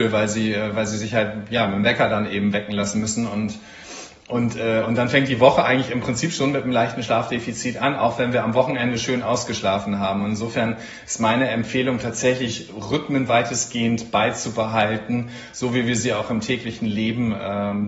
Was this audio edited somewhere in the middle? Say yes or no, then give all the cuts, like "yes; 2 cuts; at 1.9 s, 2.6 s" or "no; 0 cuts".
no; 0 cuts